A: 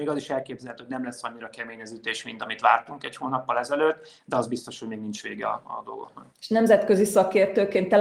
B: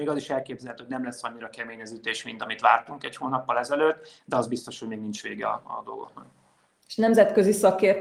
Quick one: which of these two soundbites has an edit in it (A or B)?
A